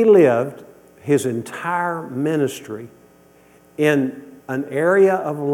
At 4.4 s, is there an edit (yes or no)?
yes